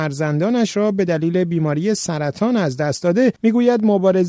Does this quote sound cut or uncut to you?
cut